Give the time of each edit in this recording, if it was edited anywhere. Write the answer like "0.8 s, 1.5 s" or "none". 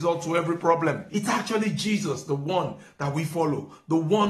1.1 s